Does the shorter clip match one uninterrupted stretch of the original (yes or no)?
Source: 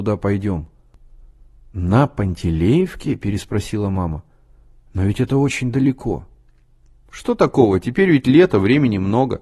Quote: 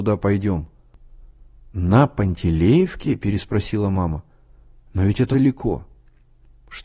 no